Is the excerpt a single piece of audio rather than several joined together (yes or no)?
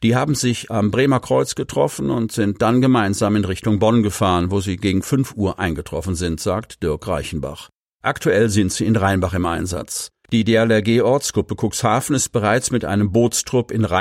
no